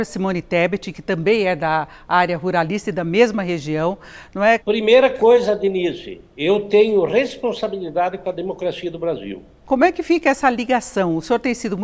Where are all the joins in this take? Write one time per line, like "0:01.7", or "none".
0:04.6
0:09.6